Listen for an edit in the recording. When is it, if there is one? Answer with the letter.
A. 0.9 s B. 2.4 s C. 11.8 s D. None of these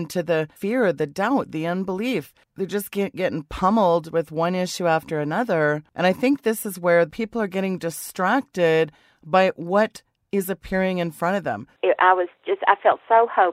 C